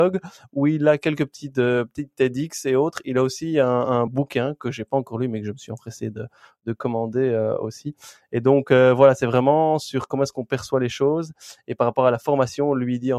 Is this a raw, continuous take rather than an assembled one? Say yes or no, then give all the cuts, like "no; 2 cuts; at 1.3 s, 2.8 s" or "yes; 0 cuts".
yes; 0 cuts